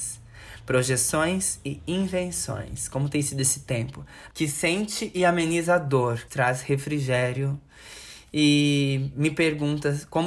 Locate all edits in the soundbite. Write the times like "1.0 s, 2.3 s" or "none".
4.3 s, 6.3 s